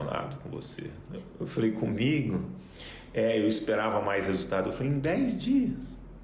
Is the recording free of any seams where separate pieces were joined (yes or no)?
yes